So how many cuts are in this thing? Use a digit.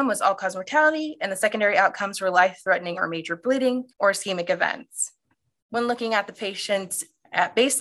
1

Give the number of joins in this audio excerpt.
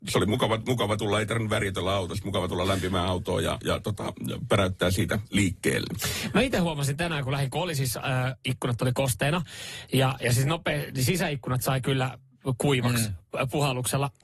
0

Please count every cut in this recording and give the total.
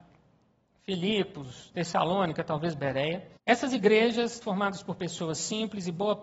2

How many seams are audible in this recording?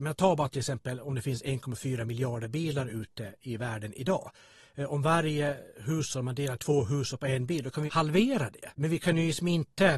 0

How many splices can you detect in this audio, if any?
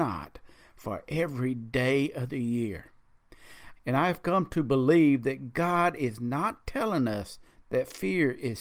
1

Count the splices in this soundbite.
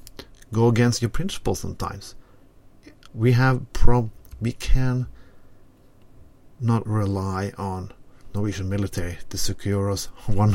2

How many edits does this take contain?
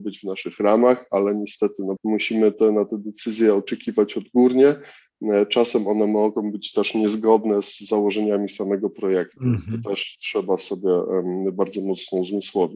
1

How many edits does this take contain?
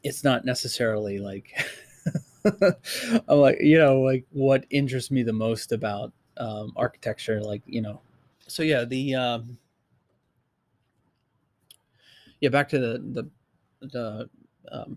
1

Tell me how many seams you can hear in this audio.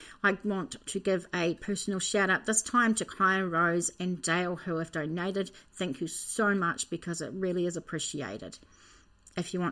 0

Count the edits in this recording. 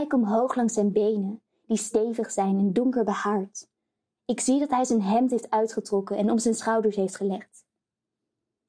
0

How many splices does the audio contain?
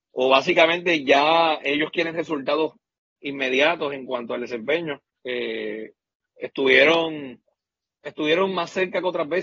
1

